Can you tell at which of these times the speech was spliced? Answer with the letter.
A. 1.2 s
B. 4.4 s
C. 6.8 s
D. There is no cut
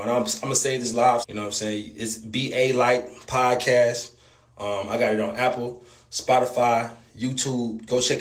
A